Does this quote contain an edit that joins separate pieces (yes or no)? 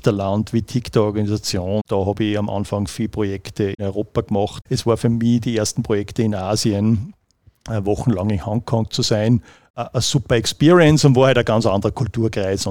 no